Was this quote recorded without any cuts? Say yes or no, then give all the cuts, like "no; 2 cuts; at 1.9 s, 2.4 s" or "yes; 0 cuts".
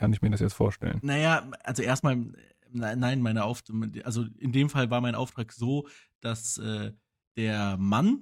yes; 0 cuts